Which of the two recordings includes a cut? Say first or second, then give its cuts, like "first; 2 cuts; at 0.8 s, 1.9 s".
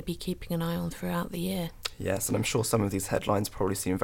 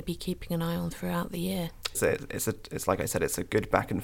second; 1 cut; at 1.9 s